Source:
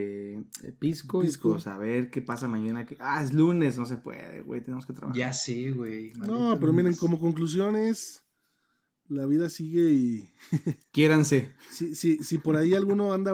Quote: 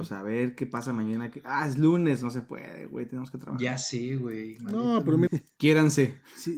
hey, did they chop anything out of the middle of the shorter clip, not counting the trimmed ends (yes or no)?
yes